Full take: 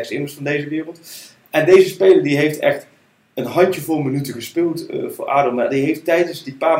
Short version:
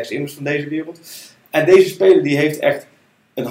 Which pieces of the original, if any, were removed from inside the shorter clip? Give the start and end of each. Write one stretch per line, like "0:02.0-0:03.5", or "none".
none